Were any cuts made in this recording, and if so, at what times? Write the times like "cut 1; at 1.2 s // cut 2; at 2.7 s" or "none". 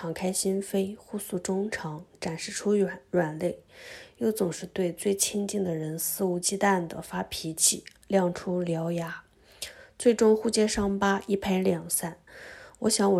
none